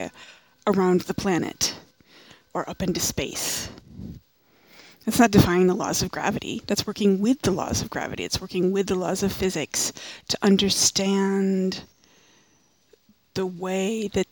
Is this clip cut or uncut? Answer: uncut